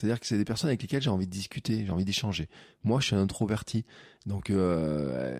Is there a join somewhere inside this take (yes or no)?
no